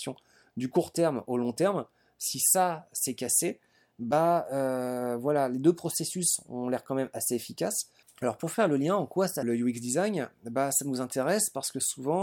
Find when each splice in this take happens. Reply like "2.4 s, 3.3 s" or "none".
8.0 s, 9.4 s